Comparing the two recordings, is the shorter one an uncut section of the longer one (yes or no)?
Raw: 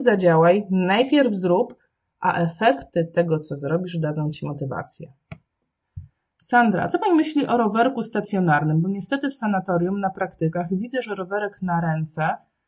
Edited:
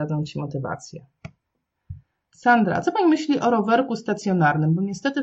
yes